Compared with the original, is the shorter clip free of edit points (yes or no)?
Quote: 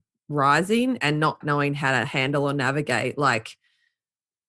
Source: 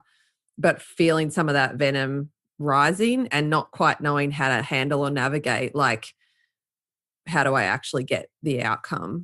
no